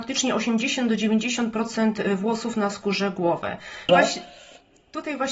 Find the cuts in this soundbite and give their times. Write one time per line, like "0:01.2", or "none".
0:03.9